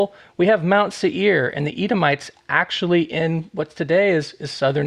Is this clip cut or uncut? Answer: uncut